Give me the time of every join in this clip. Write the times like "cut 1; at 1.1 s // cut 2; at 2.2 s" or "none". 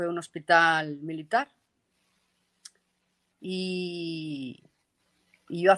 none